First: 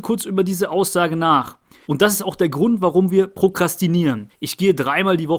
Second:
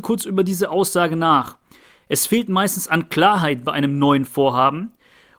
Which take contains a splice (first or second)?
first